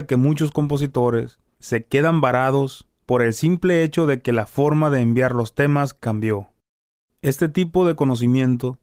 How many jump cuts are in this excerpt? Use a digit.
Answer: 0